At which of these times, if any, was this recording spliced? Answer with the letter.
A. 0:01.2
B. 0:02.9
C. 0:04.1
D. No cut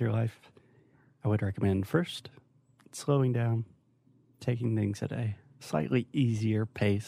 D